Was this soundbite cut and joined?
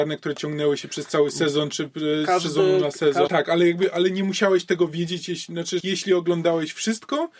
yes; 2 cuts; at 3.3 s, 5.8 s

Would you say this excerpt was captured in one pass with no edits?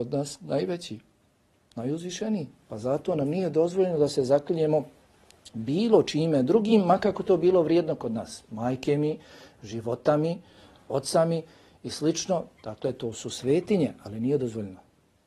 yes; 0 cuts

